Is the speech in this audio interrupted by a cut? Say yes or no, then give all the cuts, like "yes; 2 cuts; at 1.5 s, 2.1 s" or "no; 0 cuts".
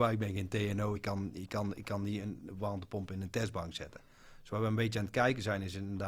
no; 0 cuts